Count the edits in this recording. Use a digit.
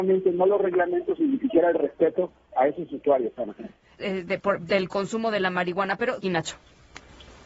2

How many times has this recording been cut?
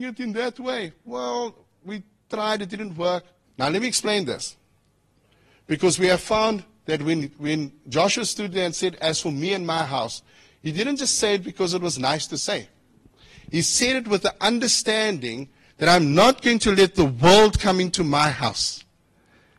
1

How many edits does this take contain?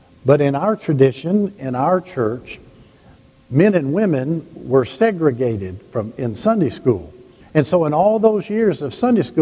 1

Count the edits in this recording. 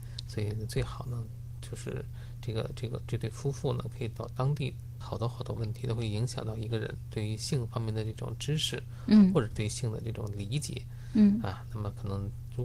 1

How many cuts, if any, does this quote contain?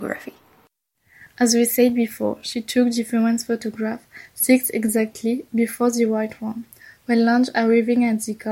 0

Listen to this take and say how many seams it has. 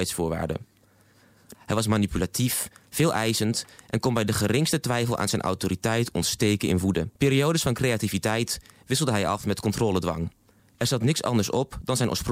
3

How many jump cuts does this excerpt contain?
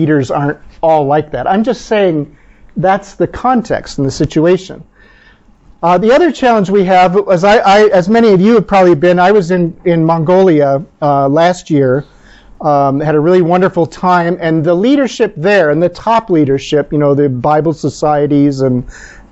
0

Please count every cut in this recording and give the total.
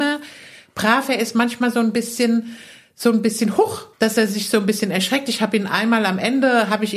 1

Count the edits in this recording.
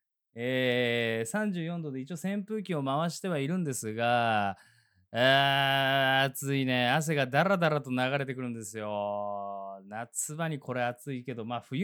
0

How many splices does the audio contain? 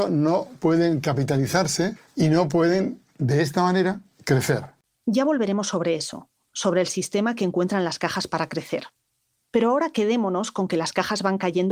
1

